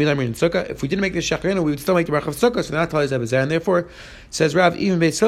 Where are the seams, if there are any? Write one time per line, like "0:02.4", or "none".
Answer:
none